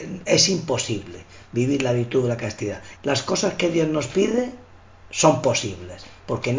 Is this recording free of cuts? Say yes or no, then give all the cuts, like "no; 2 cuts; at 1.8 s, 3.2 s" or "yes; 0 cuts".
no; 1 cut; at 3.0 s